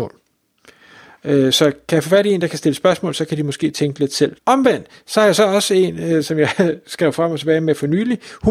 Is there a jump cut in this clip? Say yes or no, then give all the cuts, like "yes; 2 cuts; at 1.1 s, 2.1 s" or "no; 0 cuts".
yes; 1 cut; at 4.4 s